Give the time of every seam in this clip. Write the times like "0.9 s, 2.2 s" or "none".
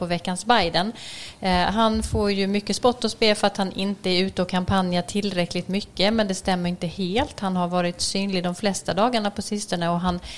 none